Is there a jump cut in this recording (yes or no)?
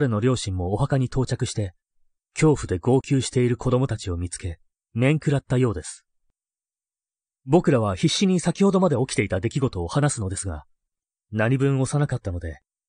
no